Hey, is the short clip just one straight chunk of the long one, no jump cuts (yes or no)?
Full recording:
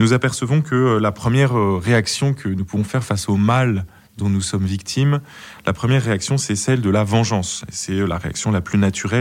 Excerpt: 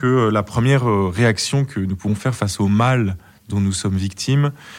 yes